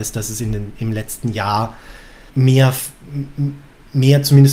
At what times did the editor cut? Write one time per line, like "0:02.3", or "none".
0:02.3